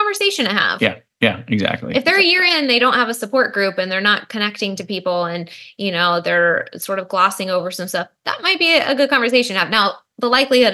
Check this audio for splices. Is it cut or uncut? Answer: uncut